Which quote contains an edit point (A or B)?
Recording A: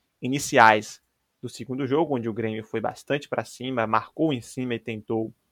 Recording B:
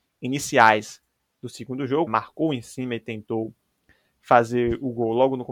B